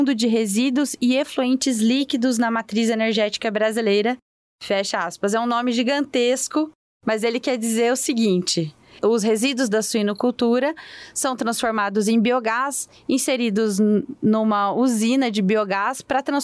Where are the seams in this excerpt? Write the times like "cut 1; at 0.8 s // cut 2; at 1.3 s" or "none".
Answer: none